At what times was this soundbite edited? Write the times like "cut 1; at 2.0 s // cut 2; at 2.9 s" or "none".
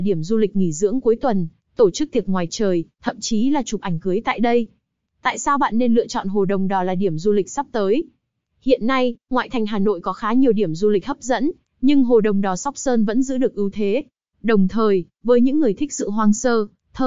cut 1; at 14.3 s